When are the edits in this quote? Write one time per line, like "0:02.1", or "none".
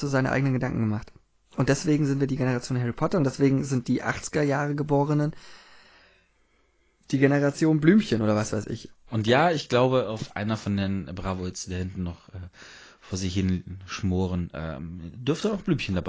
0:08.9